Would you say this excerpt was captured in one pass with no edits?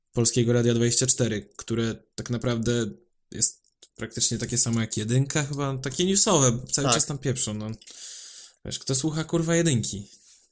yes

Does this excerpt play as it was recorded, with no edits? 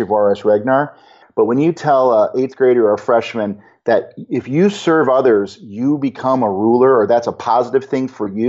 no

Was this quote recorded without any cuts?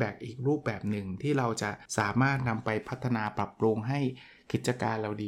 no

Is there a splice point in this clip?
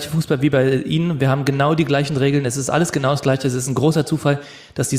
no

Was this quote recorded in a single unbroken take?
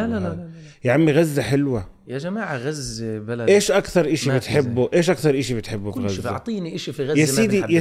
yes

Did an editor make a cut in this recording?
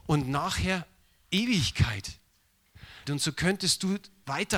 yes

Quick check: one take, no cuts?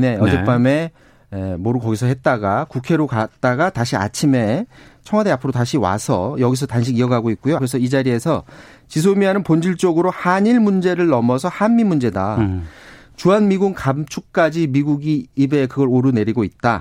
no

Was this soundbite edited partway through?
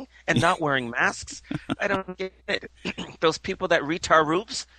no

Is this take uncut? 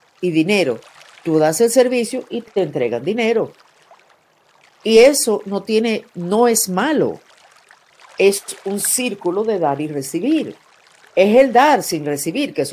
yes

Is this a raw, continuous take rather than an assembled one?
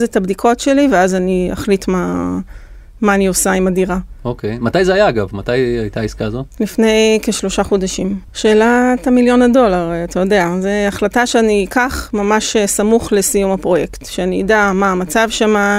no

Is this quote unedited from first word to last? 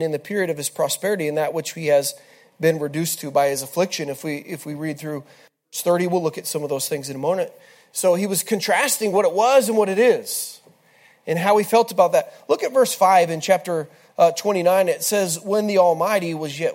yes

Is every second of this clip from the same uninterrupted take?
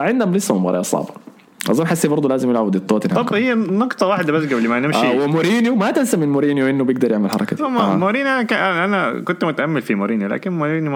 yes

